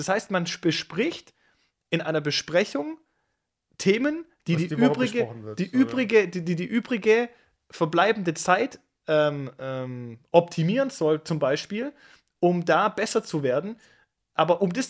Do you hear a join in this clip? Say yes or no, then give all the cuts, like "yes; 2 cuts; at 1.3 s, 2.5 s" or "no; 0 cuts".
no; 0 cuts